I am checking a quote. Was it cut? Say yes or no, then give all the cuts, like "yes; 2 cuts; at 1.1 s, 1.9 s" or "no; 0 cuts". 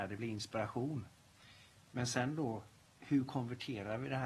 no; 0 cuts